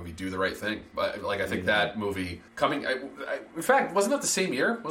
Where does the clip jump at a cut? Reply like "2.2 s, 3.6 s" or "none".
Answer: 2.5 s

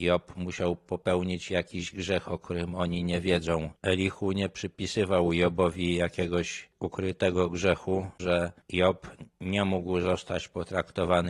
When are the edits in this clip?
8.2 s

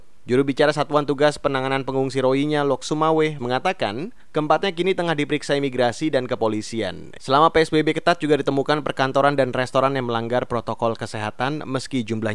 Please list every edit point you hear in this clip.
3.4 s, 7.2 s

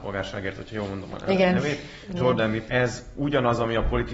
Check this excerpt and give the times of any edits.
2.7 s

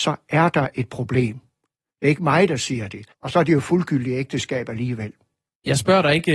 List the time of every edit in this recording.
3.1 s

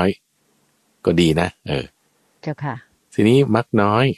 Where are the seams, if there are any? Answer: none

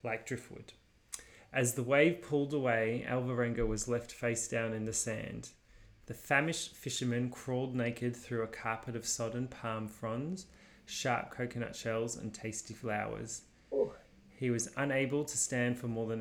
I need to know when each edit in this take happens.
6.0 s

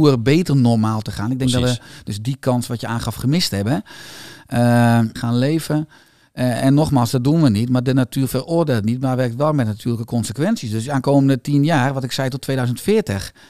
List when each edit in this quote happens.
5.2 s

